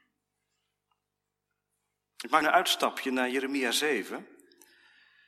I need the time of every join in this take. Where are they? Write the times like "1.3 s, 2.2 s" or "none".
2.4 s